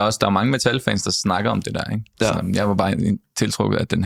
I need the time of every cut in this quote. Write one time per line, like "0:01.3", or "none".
none